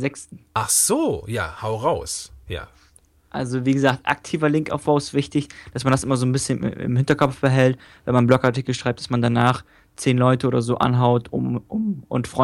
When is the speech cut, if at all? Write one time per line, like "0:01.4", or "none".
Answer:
none